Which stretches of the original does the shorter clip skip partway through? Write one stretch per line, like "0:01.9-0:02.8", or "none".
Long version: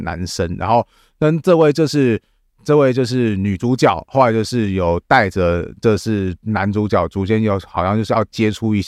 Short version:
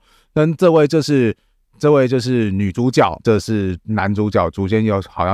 0:04.0-0:05.8